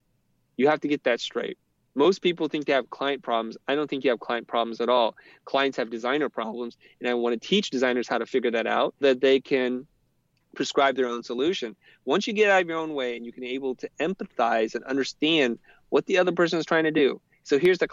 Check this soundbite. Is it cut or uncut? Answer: cut